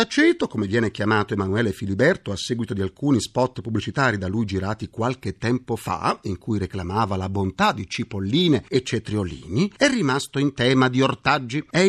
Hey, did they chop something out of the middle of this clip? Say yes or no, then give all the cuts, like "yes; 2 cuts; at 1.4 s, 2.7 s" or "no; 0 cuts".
no; 0 cuts